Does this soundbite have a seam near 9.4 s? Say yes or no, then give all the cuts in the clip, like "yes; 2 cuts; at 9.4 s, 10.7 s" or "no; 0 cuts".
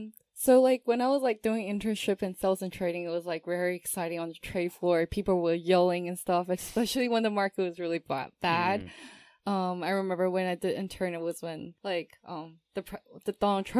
no; 1 cut; at 11.8 s